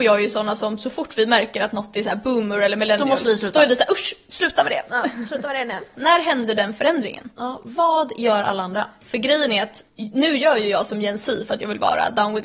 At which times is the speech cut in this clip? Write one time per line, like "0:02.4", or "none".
0:05.9
0:09.9